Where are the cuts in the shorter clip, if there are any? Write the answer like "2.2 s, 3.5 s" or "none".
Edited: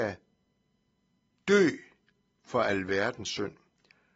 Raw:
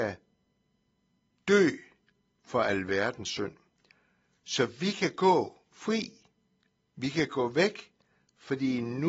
none